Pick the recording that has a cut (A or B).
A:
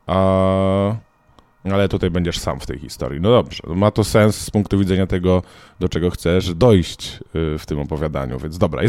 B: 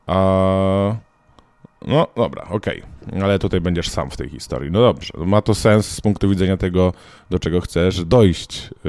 A